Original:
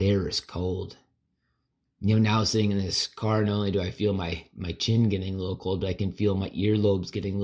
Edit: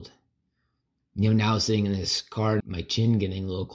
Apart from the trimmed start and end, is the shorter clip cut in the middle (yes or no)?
yes